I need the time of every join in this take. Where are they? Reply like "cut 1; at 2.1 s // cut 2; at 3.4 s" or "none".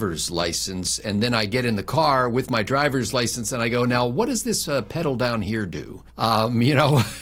cut 1; at 6.1 s